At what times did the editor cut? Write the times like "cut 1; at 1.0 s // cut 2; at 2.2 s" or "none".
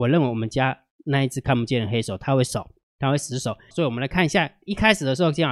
cut 1; at 3.7 s